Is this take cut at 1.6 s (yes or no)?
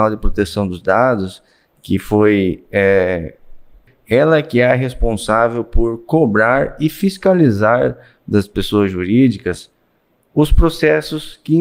no